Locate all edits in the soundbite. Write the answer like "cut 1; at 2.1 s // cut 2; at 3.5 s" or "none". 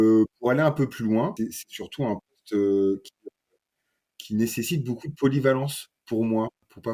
none